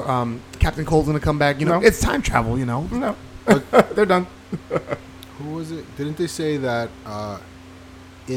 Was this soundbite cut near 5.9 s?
no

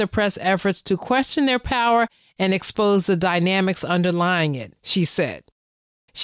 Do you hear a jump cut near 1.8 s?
no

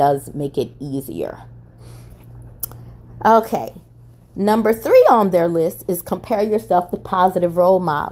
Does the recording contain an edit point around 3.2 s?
no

